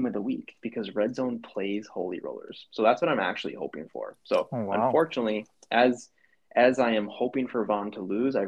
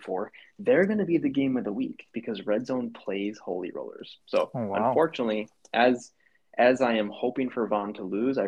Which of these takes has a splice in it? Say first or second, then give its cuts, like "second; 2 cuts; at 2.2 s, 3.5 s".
second; 1 cut; at 4.2 s